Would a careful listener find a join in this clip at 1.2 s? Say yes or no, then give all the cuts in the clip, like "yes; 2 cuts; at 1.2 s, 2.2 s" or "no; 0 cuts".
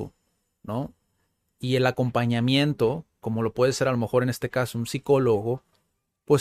no; 0 cuts